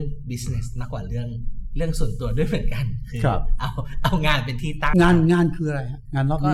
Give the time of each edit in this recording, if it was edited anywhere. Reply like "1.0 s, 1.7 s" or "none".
4.9 s